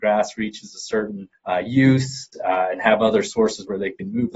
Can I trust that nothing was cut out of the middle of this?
yes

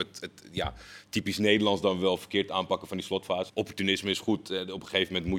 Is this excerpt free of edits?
no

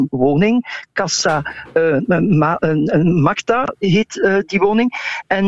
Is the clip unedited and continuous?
yes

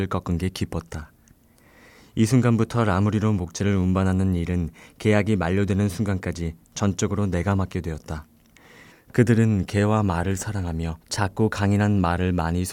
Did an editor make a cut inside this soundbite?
yes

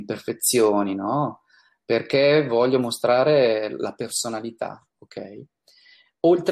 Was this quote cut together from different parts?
no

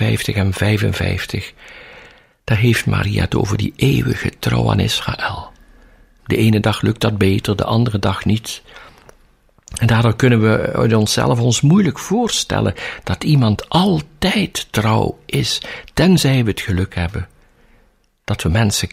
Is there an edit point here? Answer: yes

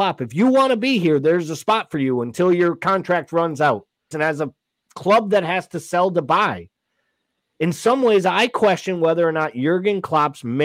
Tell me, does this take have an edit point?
yes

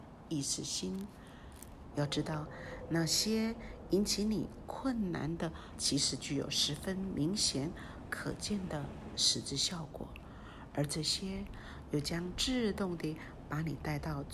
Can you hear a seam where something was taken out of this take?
yes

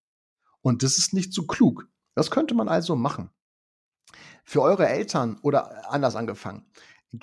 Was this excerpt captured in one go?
yes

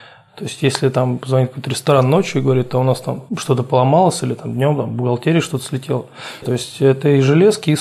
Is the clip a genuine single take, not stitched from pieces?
no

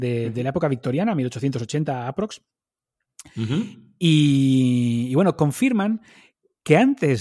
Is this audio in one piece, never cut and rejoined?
yes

